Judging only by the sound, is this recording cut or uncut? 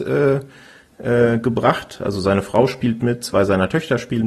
uncut